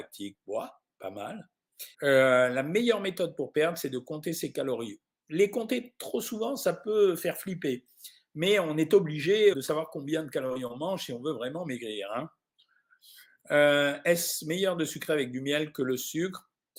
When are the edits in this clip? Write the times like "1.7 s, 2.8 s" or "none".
1.9 s, 9.5 s